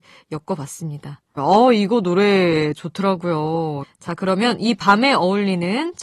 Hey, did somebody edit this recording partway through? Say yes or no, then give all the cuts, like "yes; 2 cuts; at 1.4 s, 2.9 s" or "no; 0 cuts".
yes; 2 cuts; at 1.4 s, 3.8 s